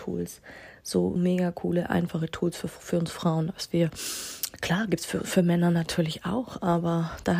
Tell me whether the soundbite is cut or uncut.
cut